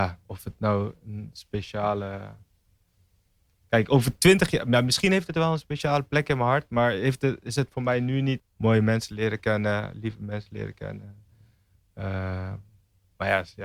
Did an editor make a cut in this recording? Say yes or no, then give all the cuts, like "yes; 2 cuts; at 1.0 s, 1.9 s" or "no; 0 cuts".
yes; 1 cut; at 8.4 s